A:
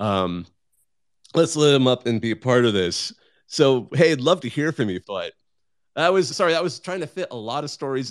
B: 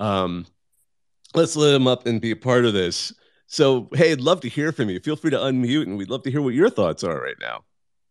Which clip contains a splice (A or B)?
A